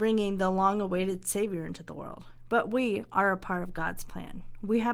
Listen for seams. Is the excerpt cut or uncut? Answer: uncut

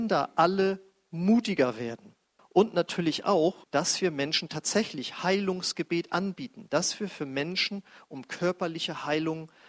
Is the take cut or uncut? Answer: cut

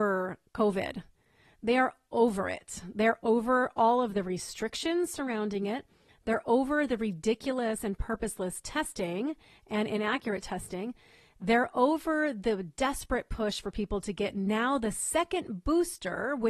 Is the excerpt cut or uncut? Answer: uncut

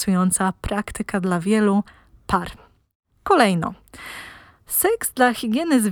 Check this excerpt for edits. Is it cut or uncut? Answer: uncut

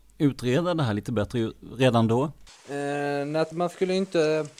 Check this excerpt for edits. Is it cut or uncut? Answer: cut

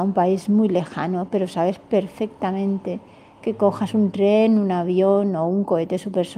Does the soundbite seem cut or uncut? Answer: uncut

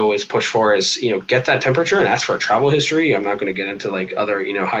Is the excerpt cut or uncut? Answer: uncut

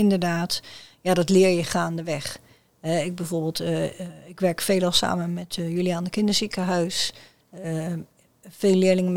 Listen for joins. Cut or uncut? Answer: uncut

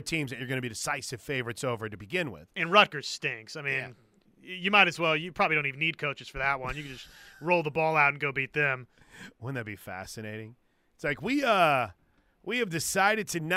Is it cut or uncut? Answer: uncut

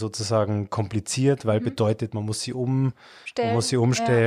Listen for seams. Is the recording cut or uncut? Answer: uncut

